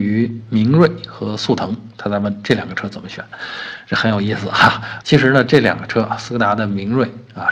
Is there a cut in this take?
yes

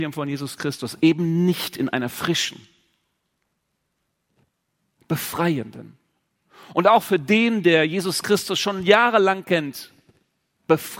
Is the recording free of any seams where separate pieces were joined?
yes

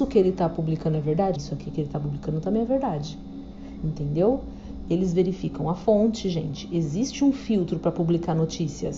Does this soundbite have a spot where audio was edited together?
yes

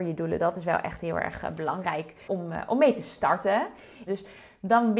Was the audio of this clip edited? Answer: yes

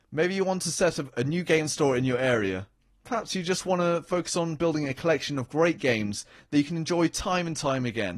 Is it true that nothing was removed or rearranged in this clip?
yes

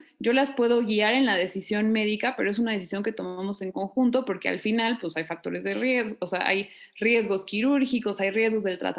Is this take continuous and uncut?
yes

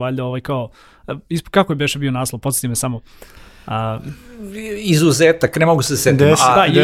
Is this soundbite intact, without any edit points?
yes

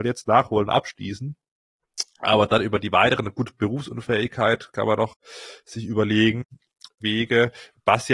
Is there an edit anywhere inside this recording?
yes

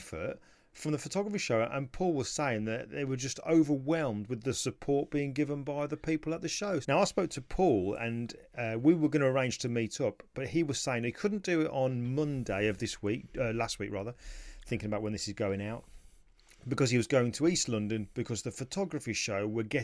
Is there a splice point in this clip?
yes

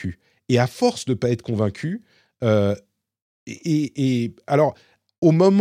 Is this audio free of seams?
yes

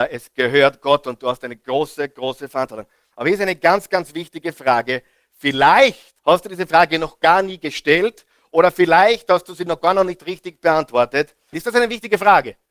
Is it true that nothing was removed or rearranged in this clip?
no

